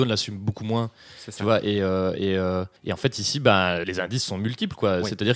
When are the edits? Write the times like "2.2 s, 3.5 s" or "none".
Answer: 2.8 s, 3.8 s